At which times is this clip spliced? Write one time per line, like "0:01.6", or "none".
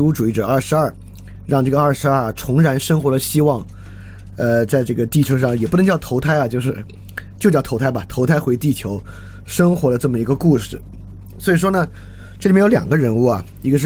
none